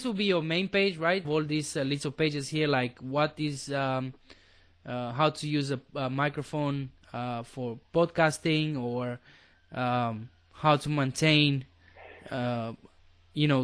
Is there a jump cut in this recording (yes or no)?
yes